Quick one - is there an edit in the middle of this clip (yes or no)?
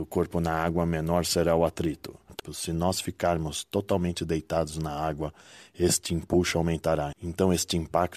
yes